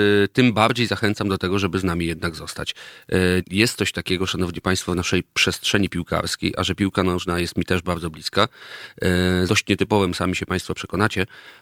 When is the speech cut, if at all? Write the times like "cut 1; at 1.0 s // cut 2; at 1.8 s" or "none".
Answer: cut 1; at 3.4 s // cut 2; at 9.5 s